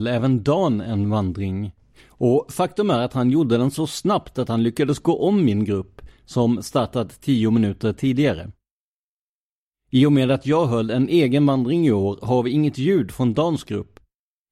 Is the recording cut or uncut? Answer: uncut